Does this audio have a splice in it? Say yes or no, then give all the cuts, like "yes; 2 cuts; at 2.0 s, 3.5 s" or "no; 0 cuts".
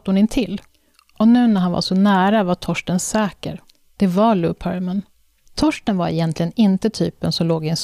yes; 1 cut; at 5.5 s